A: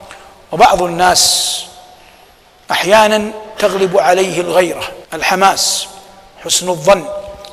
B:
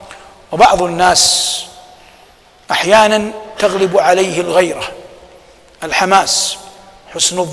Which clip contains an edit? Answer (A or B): A